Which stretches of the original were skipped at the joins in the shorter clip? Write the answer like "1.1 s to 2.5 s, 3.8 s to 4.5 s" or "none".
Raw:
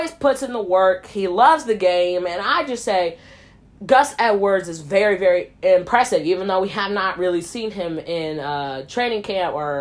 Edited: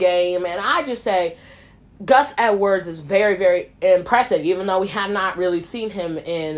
none